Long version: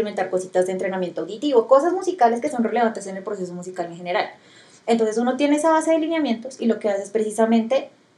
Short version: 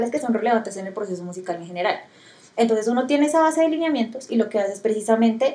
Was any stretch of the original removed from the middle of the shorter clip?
no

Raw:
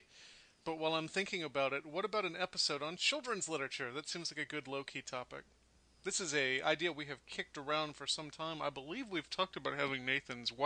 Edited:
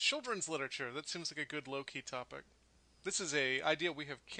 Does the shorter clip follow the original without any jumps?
yes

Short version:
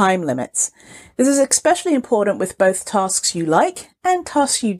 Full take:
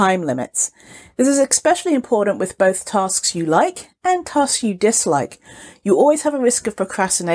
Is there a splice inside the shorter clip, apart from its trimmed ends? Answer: no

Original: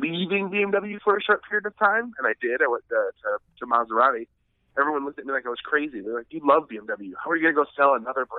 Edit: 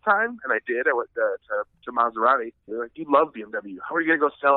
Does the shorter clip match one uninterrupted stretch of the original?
no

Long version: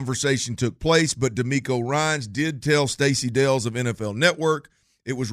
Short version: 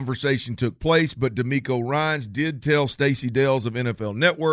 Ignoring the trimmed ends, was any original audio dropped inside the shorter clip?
no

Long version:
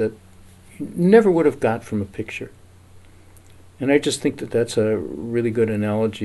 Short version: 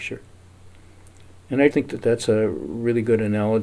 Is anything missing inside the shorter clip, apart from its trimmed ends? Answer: yes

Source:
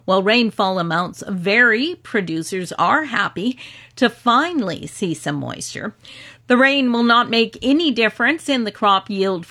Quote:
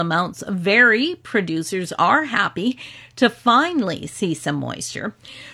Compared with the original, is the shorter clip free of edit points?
yes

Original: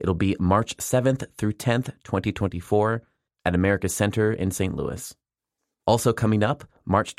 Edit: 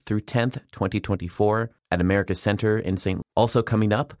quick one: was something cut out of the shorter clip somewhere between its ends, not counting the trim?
yes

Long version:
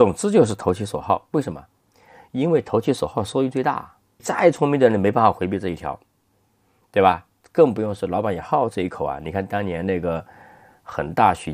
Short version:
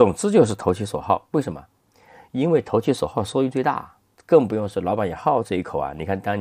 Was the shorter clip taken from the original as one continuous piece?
no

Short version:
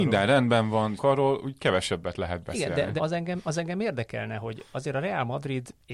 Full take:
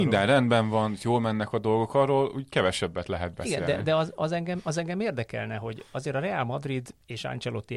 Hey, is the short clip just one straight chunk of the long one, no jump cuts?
no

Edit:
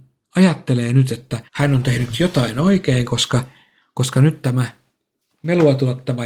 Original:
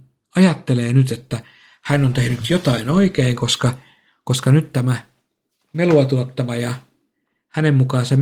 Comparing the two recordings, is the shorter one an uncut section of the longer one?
no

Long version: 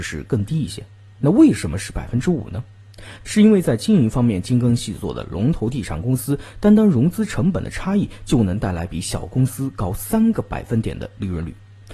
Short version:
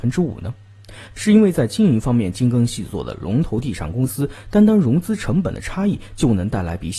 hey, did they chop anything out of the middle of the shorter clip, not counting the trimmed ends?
no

